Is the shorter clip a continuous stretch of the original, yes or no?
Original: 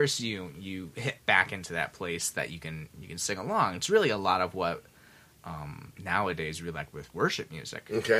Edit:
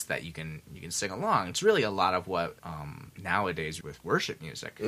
no